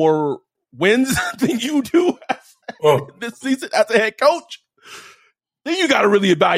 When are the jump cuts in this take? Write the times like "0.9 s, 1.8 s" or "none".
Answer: none